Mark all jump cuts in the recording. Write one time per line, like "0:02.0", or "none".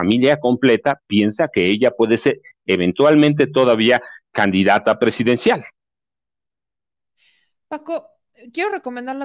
none